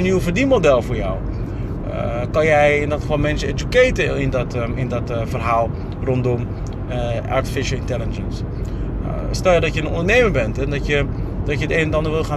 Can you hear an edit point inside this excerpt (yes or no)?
no